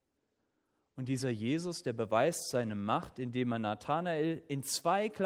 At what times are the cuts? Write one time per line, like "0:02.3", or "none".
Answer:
none